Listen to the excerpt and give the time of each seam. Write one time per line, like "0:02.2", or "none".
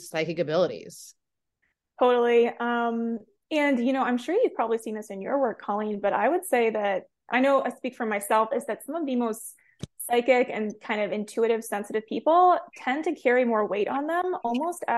0:08.5